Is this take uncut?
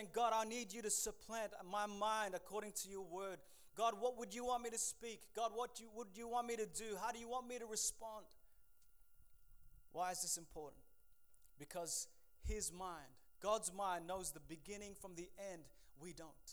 yes; 0 cuts

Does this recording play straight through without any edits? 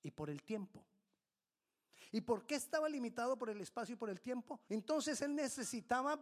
no; 1 cut; at 4.7 s

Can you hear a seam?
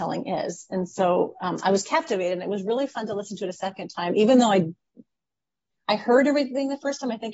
no; 0 cuts

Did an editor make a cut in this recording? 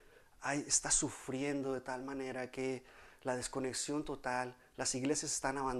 no; 0 cuts

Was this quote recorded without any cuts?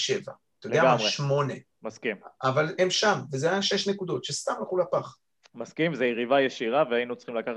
no; 1 cut; at 2.8 s

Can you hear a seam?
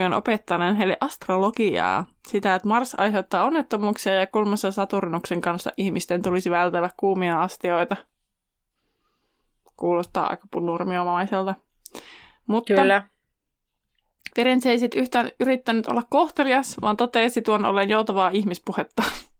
no; 0 cuts

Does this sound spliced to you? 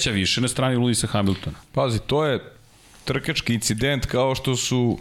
no; 0 cuts

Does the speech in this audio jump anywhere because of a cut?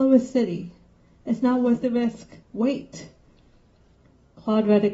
yes; 1 cut; at 2.4 s

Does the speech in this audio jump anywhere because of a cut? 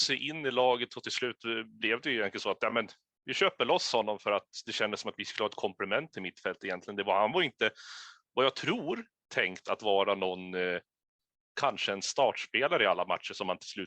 no; 0 cuts

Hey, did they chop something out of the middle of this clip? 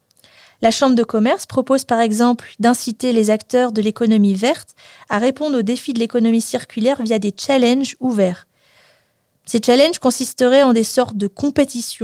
no; 0 cuts

